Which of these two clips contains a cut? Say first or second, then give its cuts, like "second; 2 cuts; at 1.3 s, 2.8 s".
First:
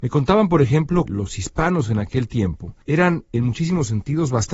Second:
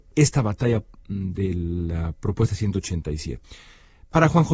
first; 2 cuts; at 1.1 s, 2.8 s